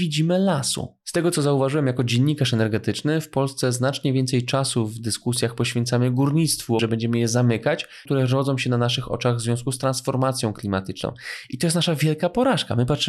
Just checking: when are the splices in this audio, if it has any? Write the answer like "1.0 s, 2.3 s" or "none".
6.8 s, 8.1 s

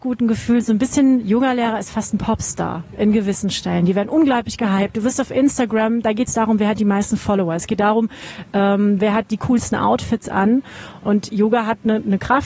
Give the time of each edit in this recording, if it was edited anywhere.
11.0 s

